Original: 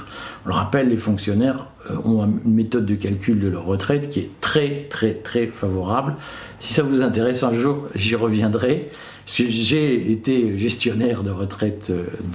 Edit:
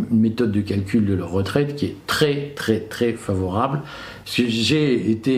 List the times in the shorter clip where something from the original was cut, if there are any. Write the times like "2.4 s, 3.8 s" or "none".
4.2 s

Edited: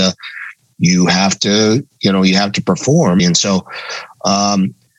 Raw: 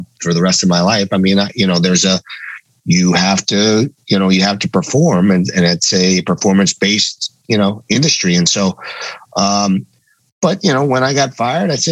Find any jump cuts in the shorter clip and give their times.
3.2 s

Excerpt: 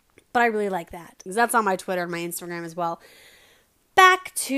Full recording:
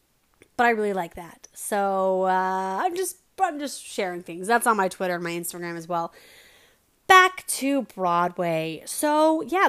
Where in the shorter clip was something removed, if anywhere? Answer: 1.3 s

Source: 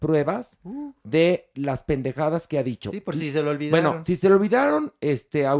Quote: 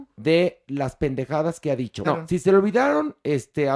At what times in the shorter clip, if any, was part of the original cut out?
2.0 s

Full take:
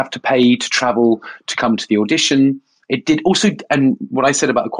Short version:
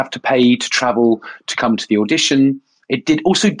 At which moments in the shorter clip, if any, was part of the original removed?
none

